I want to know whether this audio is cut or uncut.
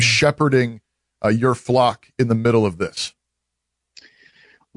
uncut